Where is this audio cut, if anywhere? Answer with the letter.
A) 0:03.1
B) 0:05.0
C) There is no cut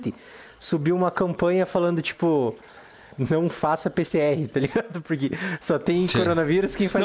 A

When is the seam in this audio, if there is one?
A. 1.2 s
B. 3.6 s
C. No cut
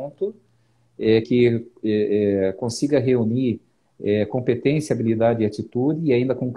A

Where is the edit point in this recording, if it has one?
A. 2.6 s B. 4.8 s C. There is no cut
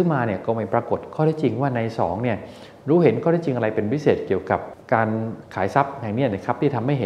B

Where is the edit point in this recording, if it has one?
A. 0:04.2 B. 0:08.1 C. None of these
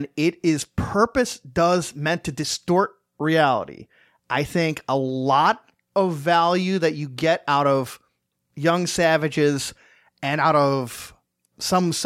C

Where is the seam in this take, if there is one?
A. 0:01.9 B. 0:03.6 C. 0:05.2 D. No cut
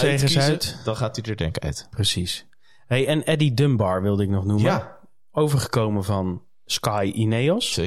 D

